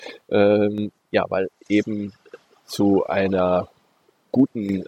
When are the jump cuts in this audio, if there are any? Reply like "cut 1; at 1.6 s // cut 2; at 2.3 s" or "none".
none